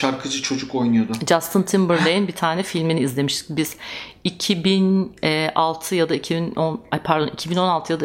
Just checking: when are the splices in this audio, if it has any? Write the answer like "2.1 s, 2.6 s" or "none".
none